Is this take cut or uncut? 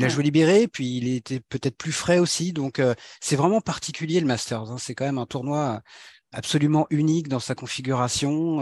uncut